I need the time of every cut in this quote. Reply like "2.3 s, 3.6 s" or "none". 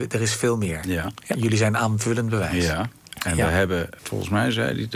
4.0 s